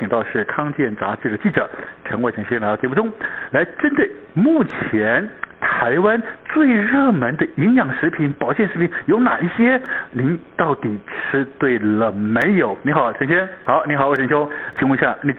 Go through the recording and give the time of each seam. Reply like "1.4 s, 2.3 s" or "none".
13.7 s